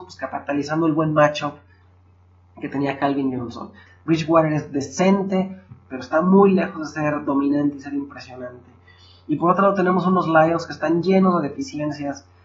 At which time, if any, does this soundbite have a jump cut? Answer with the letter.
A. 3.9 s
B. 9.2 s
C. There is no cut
A